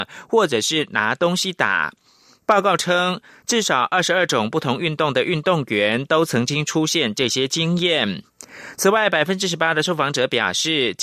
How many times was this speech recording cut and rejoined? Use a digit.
0